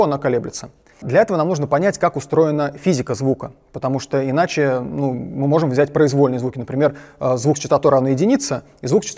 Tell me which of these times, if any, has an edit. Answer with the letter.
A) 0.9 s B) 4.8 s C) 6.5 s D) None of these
A